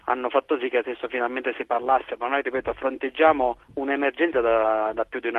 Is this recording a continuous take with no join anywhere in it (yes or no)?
yes